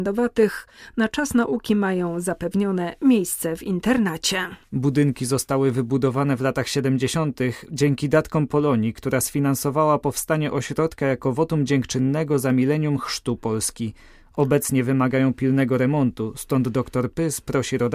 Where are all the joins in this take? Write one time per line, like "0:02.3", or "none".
none